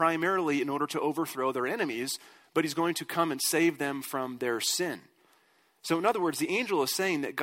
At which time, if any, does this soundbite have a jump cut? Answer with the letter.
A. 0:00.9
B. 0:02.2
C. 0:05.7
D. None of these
D